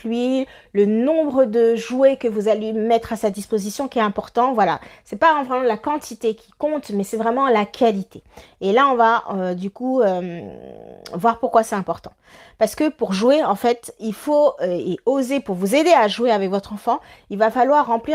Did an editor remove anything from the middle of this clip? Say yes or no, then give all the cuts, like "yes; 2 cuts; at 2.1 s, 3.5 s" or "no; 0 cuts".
no; 0 cuts